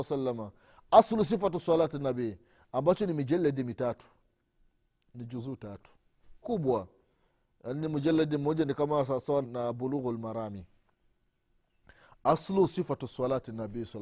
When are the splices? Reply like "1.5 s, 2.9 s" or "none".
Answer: 6.4 s, 9.4 s